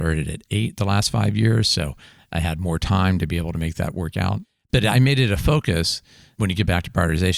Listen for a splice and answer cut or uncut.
uncut